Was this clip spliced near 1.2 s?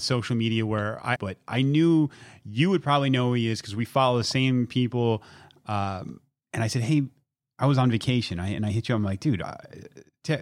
yes; 1 cut; at 1.2 s

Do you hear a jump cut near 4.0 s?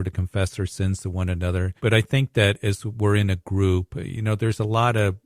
no; 1 cut; at 1.8 s

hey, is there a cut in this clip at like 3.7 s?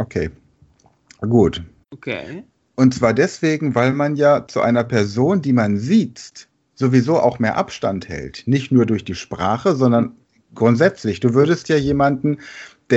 no; 1 cut; at 1.8 s

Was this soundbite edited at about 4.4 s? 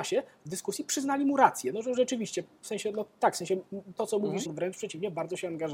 yes; 1 cut; at 4.4 s

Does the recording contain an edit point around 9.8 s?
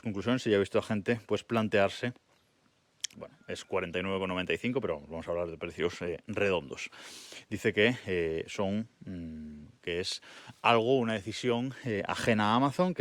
yes; 3 cuts; at 3.1 s, 7.4 s, 9.8 s

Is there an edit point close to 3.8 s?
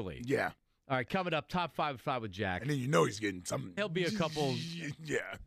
yes; 1 cut; at 3.8 s

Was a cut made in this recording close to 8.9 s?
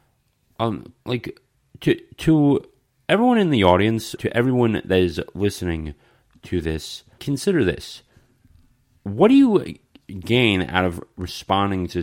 no; 2 cuts; at 4.2 s, 7.2 s

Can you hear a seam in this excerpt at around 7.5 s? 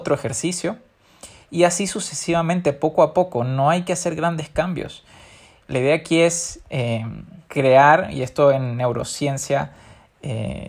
yes; 2 cuts; at 5.6 s, 7.5 s

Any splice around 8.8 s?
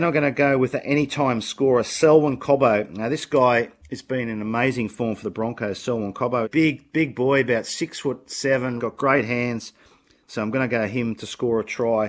yes; 2 cuts; at 6.4 s, 8.8 s

